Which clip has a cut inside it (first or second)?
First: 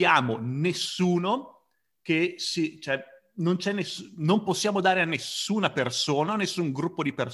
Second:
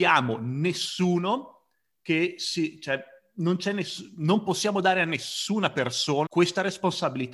second